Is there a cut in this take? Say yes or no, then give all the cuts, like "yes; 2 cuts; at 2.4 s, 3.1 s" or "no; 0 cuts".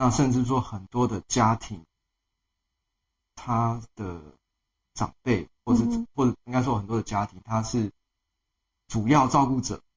no; 0 cuts